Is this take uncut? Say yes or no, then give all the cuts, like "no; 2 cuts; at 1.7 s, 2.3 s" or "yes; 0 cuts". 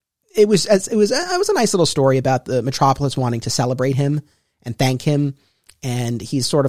yes; 0 cuts